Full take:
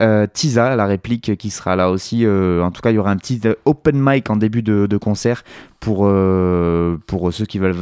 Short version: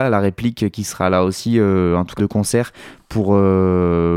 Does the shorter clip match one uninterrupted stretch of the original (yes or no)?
no